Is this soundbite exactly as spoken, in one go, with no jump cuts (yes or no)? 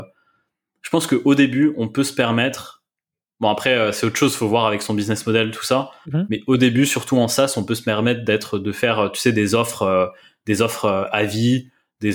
yes